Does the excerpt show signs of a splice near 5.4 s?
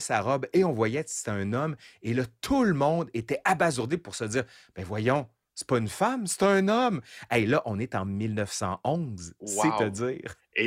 no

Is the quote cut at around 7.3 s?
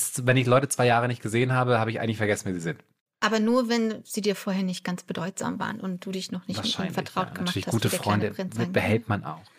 no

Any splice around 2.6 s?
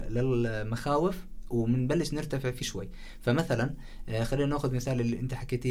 yes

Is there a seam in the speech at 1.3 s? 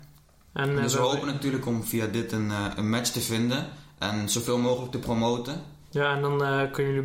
no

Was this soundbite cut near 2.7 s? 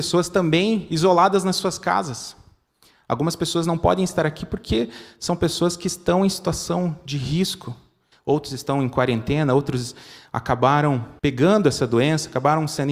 no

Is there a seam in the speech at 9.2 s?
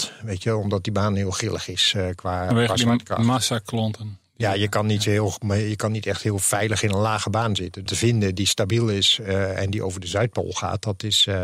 no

